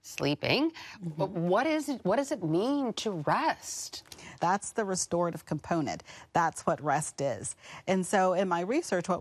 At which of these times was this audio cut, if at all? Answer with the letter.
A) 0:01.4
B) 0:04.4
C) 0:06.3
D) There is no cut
B